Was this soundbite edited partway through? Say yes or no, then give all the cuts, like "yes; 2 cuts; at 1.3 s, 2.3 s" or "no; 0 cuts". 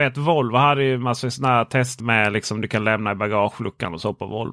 yes; 1 cut; at 2.0 s